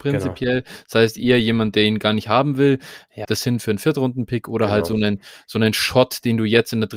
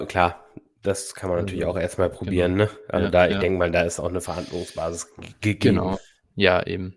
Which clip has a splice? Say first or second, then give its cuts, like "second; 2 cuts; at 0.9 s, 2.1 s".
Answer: first; 1 cut; at 3.2 s